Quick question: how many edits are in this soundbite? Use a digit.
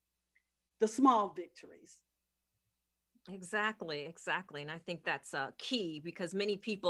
0